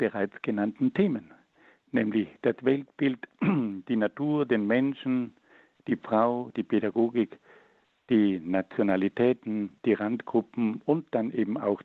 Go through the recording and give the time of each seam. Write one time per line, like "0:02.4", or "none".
0:06.5
0:09.8

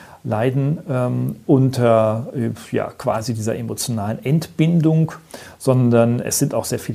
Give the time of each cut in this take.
none

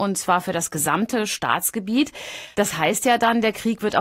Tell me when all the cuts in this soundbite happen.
none

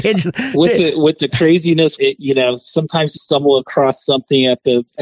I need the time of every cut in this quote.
0:02.0
0:03.2

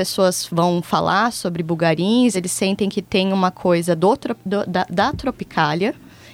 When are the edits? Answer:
none

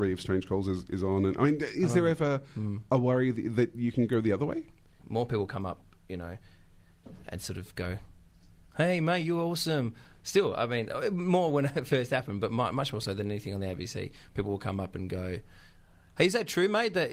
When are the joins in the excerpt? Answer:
0:05.0

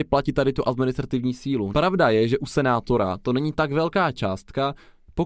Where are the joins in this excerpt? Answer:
0:01.7

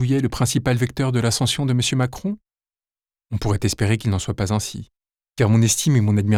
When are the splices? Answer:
none

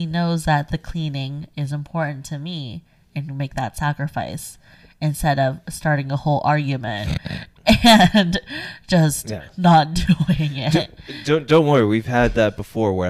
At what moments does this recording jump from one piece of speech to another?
none

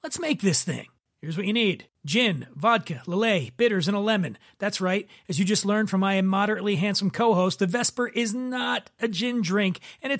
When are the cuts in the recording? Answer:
none

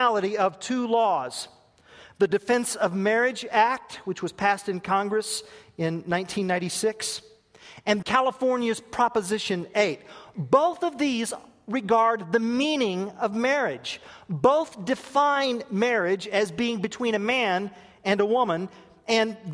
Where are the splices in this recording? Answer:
0:08.0

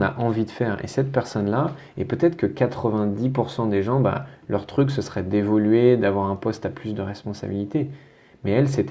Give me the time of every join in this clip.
none

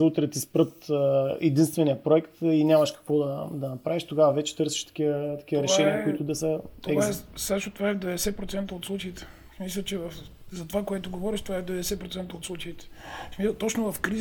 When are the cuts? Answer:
none

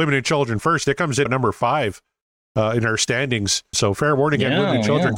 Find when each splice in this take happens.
0:01.3
0:03.7

